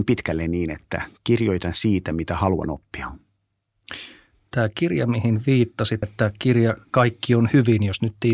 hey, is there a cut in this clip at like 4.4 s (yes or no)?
no